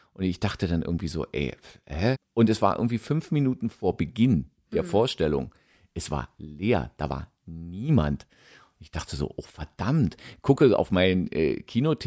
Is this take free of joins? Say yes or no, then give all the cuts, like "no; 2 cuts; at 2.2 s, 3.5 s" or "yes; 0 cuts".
no; 1 cut; at 2.1 s